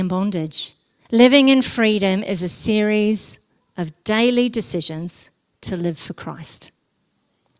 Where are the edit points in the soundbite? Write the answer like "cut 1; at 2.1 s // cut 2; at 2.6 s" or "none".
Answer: cut 1; at 1.1 s